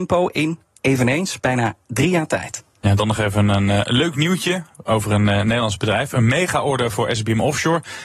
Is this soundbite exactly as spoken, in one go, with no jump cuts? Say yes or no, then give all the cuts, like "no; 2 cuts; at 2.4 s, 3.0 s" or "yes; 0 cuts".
yes; 0 cuts